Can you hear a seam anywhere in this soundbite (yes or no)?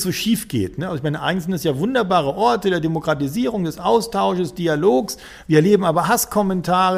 no